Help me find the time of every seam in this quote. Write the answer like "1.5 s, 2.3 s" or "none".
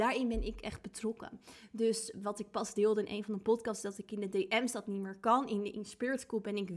none